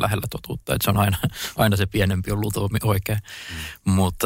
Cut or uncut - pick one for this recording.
uncut